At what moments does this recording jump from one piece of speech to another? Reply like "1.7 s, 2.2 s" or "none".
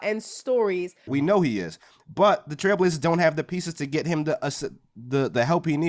1.1 s